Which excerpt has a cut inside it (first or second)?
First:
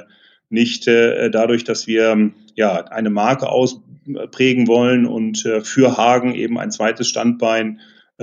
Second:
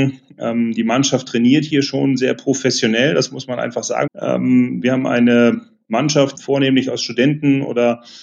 second